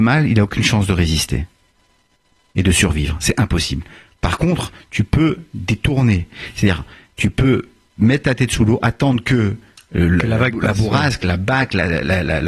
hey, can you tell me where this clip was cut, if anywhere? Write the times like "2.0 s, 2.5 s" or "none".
none